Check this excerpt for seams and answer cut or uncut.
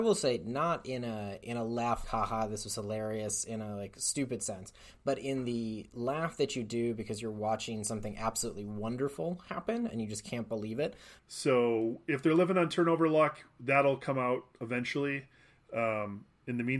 cut